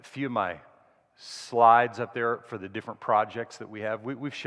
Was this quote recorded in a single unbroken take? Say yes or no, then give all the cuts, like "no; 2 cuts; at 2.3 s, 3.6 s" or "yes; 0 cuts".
yes; 0 cuts